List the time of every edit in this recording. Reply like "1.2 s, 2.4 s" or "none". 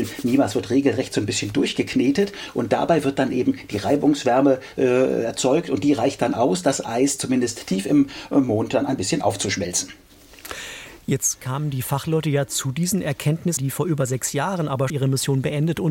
13.6 s, 14.9 s

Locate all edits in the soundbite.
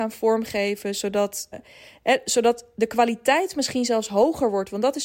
1.5 s

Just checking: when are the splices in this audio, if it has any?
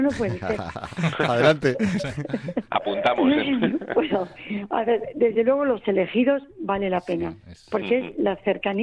none

